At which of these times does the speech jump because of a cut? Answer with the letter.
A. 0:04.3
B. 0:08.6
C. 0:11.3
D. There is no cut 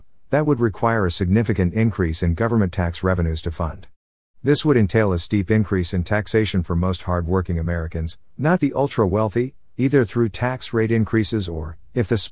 B